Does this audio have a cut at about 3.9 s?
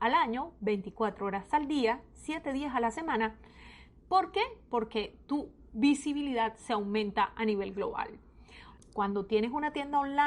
no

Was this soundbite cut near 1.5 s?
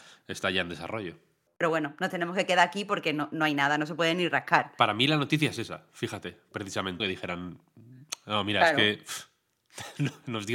yes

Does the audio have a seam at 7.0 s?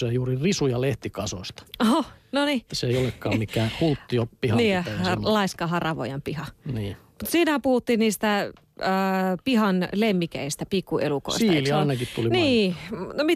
no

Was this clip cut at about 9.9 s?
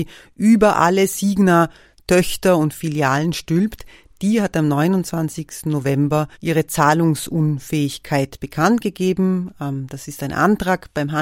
no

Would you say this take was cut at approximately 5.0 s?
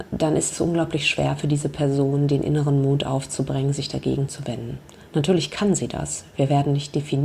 no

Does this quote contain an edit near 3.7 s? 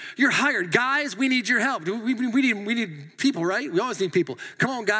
no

